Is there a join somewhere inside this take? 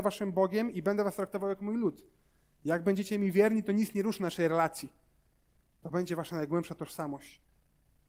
no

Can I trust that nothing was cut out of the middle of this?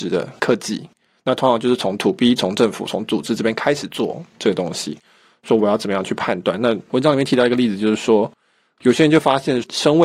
yes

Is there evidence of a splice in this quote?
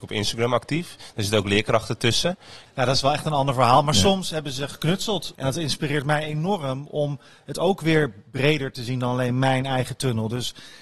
yes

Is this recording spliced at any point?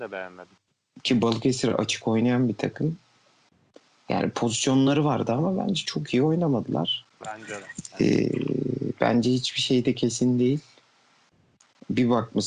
no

